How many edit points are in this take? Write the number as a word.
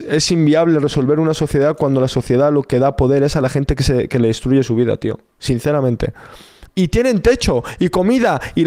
one